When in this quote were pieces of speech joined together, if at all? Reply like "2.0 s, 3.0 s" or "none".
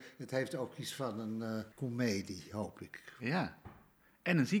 1.7 s